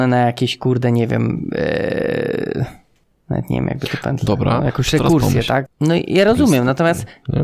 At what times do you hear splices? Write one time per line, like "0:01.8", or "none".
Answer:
0:05.7